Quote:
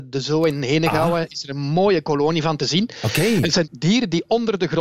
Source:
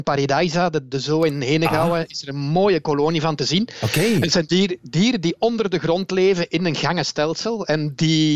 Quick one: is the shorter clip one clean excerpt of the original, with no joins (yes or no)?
no